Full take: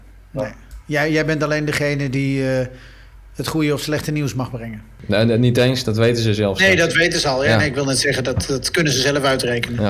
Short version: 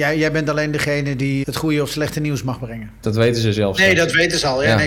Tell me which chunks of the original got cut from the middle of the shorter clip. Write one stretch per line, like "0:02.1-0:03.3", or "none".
0:02.4-0:03.3
0:04.9-0:05.8